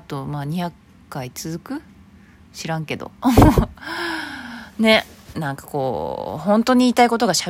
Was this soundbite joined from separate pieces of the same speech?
yes; 1 cut; at 5.3 s

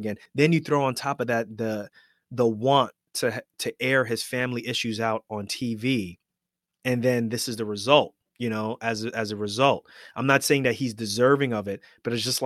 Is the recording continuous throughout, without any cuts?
yes; 0 cuts

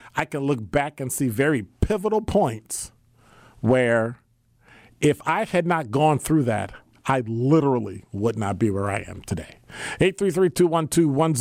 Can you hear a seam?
no; 0 cuts

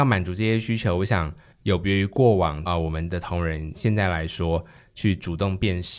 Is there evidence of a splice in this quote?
yes; 2 cuts; at 2.7 s, 4.9 s

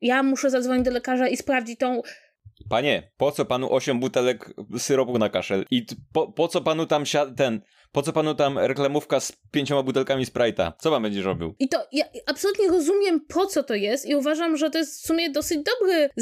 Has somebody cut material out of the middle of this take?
yes; 1 cut; at 11.6 s

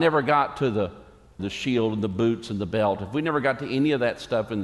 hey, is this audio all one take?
no; 1 cut; at 1.4 s

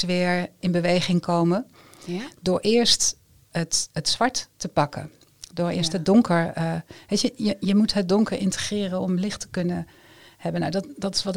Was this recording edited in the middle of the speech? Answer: no; 0 cuts

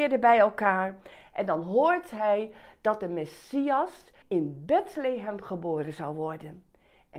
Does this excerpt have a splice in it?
yes; 1 cut; at 4.2 s

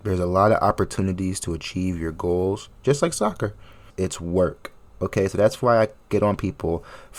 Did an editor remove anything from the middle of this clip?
yes; 1 cut; at 3.9 s

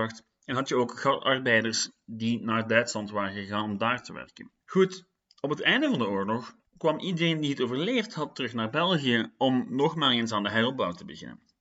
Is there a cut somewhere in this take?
yes; 2 cuts; at 4.6 s, 6.7 s

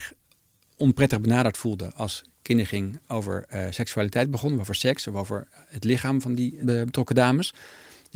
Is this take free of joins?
yes; 0 cuts

